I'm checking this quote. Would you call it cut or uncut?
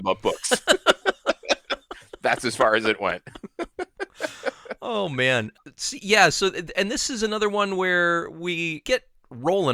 uncut